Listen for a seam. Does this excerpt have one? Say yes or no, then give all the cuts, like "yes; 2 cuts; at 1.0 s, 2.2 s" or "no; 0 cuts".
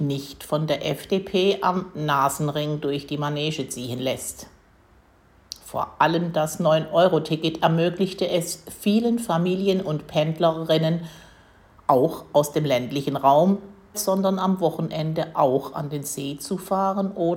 yes; 1 cut; at 13.9 s